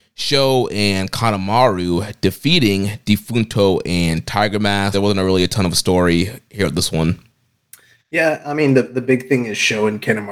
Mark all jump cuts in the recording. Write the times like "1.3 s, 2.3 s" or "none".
4.9 s